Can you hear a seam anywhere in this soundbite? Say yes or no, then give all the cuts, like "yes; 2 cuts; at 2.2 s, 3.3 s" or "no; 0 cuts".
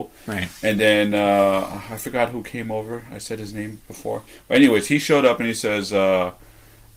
no; 0 cuts